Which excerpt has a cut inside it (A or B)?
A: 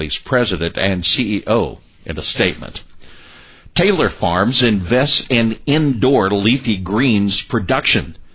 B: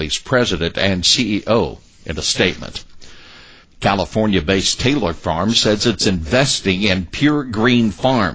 B